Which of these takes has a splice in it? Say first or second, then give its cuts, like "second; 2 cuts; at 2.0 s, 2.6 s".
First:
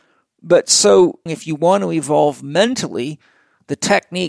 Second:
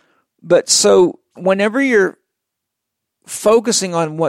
first; 1 cut; at 1.3 s